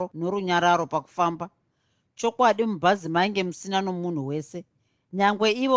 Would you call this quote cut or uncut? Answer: uncut